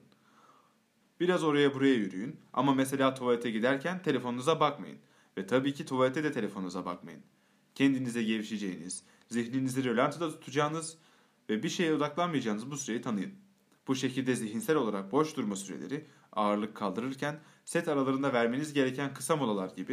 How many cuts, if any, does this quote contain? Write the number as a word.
one